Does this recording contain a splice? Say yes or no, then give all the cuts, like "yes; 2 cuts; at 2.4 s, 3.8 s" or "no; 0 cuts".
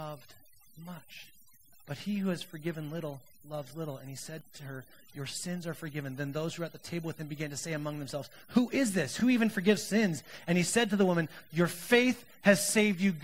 no; 0 cuts